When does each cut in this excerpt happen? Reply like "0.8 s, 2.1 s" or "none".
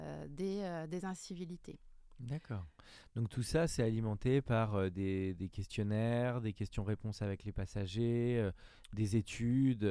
none